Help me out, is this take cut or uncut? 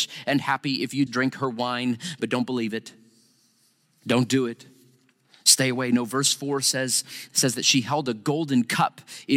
cut